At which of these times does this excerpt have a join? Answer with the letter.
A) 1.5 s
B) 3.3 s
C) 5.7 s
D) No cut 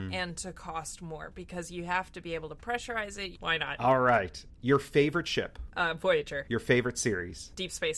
B